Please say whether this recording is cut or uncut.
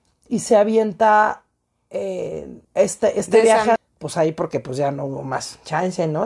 cut